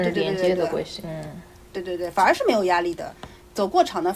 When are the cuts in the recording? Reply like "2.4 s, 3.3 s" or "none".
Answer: none

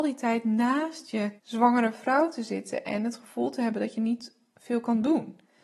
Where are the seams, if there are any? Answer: 1.4 s

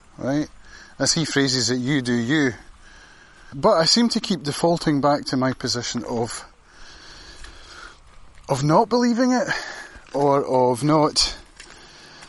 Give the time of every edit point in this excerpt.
3.5 s

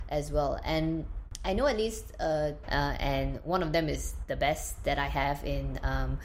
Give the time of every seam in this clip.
2.6 s

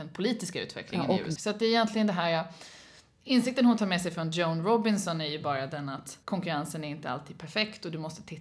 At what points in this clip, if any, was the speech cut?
1.4 s, 6.2 s

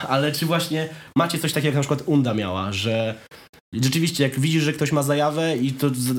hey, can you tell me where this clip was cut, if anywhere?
none

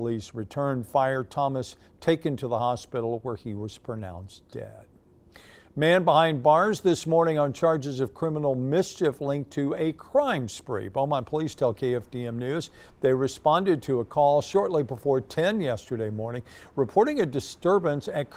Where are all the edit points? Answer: none

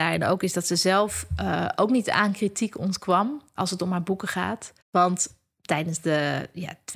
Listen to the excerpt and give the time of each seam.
3.6 s, 4.8 s

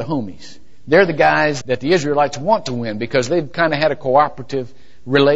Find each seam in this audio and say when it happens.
1.6 s

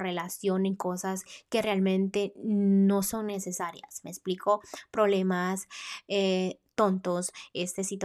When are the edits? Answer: none

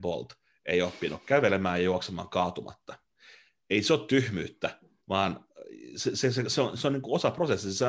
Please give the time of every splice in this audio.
5.0 s

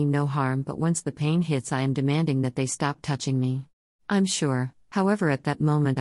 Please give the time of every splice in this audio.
3.9 s

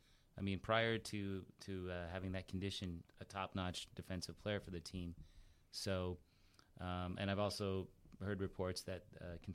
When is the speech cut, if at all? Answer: 3.0 s

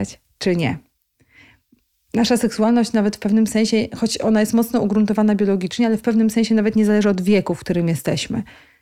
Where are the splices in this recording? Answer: none

